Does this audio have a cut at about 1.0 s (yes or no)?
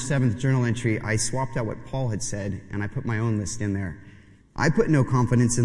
yes